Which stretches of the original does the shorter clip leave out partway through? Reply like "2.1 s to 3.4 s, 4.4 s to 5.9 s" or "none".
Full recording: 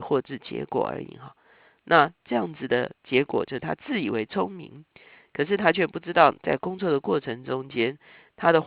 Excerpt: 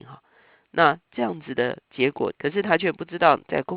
3.5 s to 5.3 s